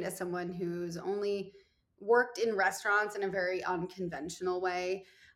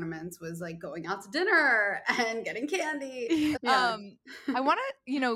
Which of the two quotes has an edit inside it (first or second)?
second